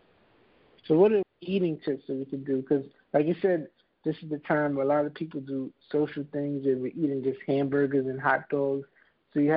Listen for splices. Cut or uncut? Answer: cut